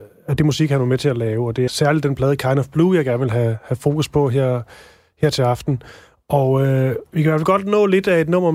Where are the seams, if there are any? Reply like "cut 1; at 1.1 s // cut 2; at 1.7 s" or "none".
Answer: cut 1; at 1.7 s